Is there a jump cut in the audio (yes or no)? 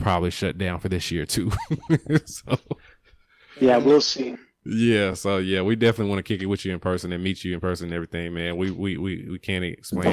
no